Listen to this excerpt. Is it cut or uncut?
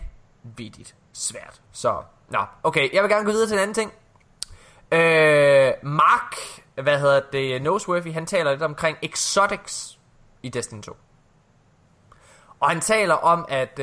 cut